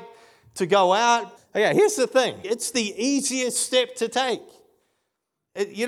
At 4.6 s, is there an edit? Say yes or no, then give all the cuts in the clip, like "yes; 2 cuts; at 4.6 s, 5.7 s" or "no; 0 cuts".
no; 2 cuts; at 1.4 s, 2.4 s